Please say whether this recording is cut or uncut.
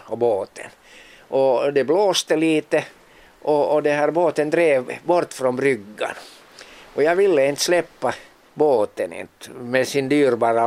uncut